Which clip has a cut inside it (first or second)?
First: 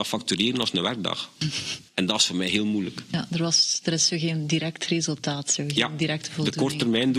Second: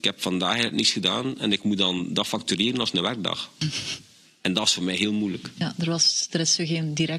first